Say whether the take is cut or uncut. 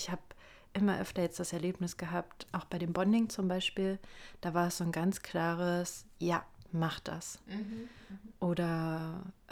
cut